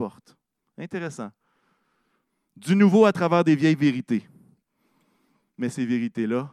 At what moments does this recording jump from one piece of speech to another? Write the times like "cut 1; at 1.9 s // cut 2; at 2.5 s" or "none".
none